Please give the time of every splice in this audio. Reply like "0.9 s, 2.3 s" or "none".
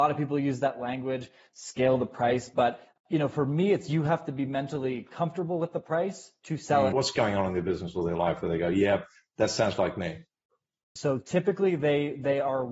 6.9 s, 11.0 s